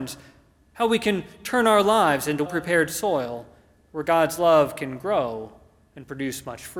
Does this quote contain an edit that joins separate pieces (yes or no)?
yes